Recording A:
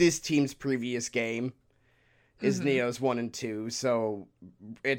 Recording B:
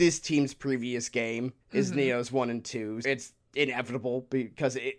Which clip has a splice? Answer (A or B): B